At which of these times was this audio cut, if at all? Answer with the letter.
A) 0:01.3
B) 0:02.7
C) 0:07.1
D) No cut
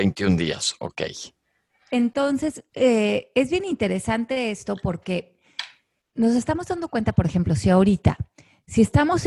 D